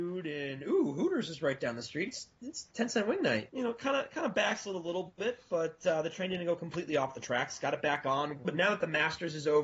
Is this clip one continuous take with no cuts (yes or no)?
no